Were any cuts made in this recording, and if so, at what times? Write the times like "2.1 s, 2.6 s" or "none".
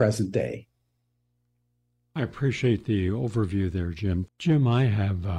4.2 s